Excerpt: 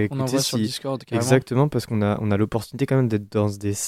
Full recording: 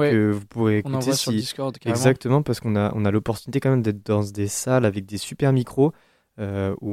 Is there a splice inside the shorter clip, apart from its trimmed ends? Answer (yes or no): no